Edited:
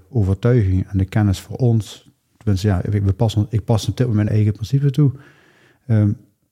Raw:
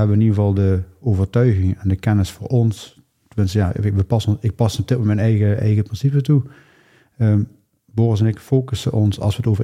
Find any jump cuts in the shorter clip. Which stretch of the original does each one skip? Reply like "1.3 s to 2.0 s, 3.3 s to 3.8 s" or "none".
5.2 s to 5.6 s

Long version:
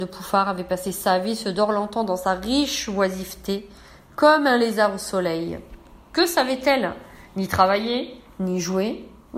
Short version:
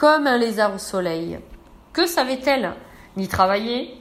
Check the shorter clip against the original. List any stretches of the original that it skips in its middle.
none

